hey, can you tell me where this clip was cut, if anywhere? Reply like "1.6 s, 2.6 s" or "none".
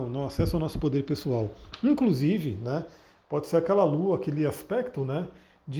none